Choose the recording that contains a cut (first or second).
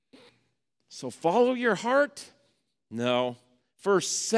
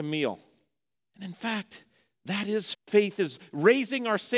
second